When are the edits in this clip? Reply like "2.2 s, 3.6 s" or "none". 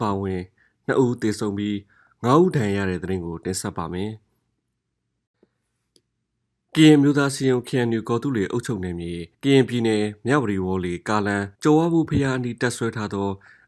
9.3 s, 11.5 s